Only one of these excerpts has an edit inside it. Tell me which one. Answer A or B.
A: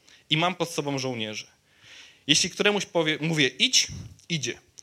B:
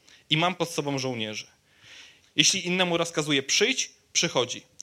B